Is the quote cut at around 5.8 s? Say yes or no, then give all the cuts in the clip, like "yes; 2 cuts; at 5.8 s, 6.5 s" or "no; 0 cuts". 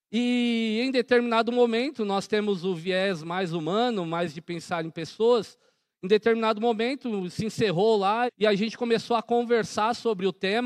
no; 1 cut; at 8.3 s